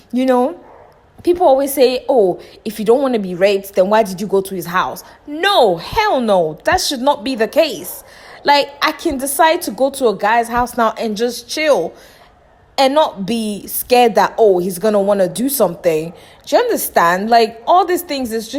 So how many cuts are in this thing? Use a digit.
0